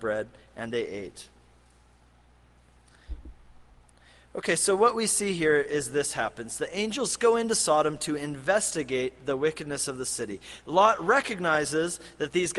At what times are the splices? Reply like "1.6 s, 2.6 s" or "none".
none